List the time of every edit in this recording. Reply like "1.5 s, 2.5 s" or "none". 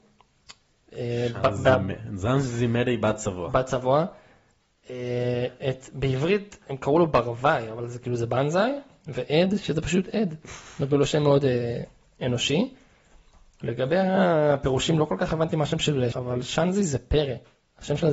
16.1 s